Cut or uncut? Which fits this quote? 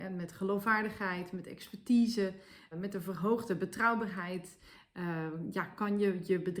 cut